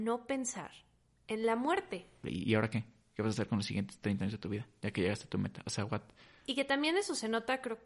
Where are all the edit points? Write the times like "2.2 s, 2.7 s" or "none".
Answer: 2.2 s